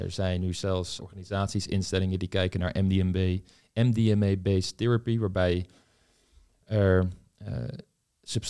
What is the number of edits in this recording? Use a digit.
1